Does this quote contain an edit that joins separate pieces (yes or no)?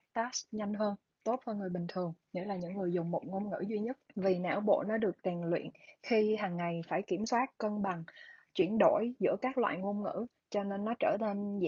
yes